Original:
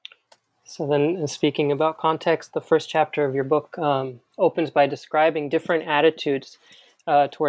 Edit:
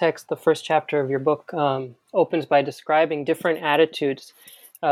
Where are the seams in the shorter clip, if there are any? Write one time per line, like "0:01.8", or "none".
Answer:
none